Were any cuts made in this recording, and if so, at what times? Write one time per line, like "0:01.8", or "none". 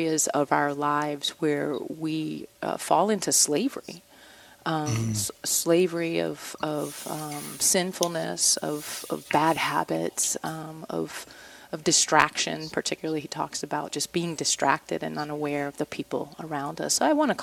none